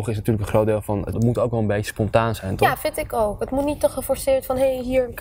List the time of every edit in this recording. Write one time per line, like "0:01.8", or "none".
0:01.1